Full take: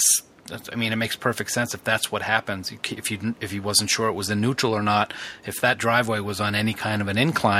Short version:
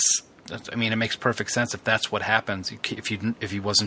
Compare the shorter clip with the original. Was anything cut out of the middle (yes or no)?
no